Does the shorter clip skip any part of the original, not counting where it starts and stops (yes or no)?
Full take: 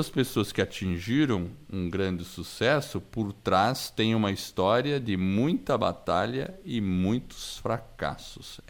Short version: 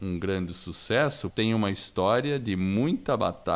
yes